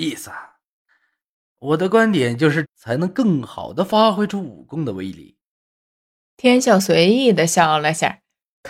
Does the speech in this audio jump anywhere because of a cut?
yes; 1 cut; at 2.6 s

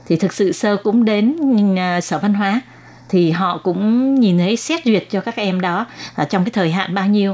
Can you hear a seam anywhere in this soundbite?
no; 0 cuts

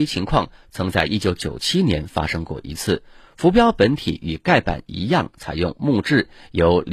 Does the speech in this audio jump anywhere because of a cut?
no; 0 cuts

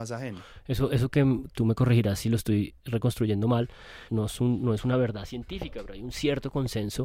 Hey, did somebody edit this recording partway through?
yes; 2 cuts; at 1.5 s, 4.1 s

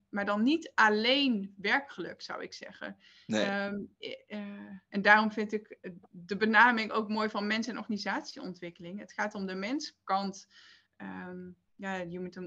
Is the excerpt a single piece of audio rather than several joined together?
no; 1 cut; at 4.9 s

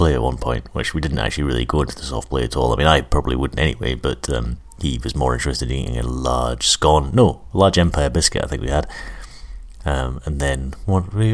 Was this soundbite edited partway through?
no; 0 cuts

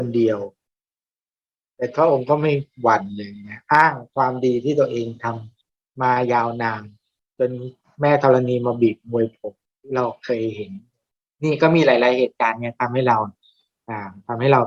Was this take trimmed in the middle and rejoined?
no; 0 cuts

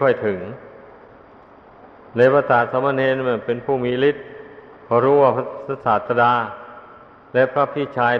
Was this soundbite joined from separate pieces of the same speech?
no; 0 cuts

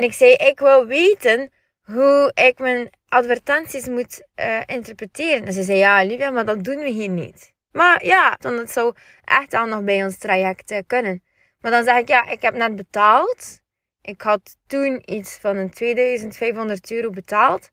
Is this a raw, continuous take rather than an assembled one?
no; 1 cut; at 8.4 s

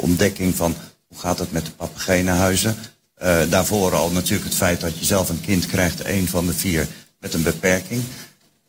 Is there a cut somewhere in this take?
no; 0 cuts

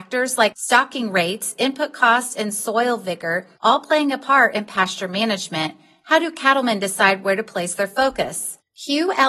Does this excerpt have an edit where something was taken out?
no; 0 cuts

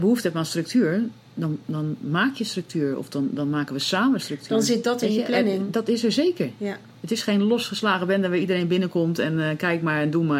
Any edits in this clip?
no; 0 cuts

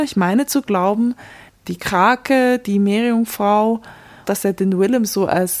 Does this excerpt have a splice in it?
yes; 2 cuts; at 1.5 s, 4.2 s

